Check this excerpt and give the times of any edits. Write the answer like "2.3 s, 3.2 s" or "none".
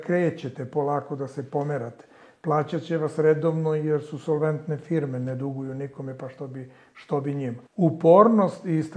7.7 s